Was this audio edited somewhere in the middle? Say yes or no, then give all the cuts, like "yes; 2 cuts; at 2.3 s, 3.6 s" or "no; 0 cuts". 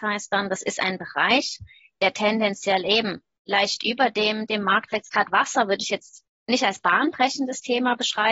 no; 0 cuts